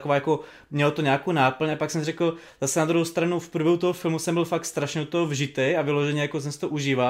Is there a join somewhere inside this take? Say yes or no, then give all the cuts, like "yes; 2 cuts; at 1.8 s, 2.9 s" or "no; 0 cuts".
no; 0 cuts